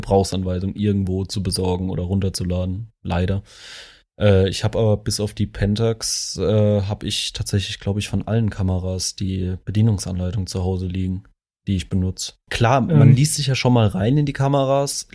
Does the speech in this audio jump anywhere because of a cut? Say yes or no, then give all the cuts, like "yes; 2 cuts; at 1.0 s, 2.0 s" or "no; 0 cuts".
yes; 1 cut; at 12.5 s